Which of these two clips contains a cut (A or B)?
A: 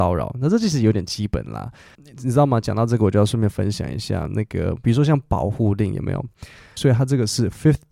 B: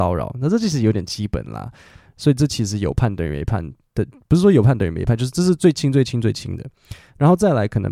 A